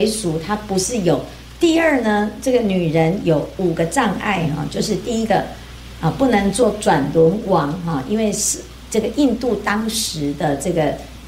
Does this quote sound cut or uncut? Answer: cut